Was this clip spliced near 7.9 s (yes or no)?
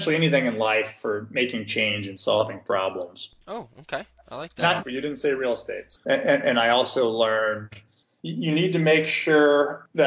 no